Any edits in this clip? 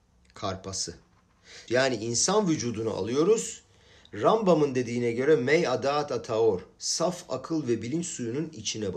yes; 1 cut; at 1.7 s

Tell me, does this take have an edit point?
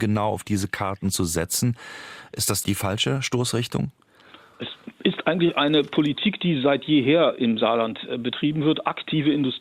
no; 0 cuts

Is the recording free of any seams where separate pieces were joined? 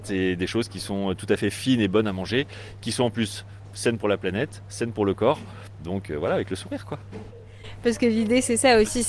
yes; 0 cuts

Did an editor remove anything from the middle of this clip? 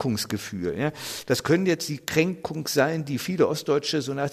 yes; 1 cut; at 1.3 s

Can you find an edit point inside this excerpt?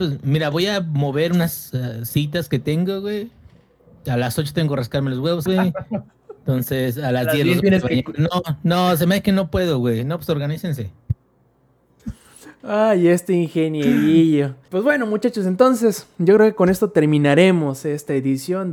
yes; 2 cuts; at 5.5 s, 14.7 s

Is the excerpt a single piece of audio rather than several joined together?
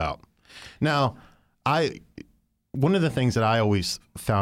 yes; 0 cuts

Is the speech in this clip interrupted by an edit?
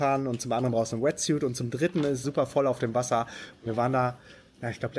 yes; 1 cut; at 2.2 s

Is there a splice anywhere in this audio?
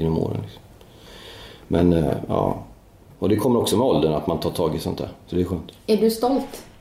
no; 0 cuts

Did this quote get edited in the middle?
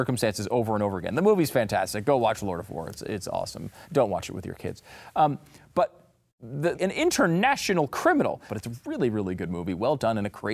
yes; 2 cuts; at 6.7 s, 8.5 s

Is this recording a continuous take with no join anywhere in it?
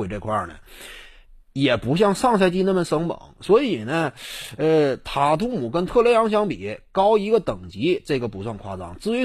yes; 0 cuts

